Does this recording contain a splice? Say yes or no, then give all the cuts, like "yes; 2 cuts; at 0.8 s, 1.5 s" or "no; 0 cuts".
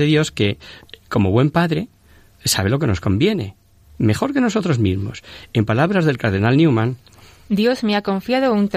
no; 0 cuts